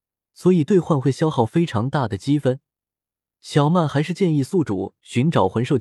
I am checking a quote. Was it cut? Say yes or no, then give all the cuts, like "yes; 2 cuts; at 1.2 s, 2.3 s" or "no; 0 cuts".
no; 0 cuts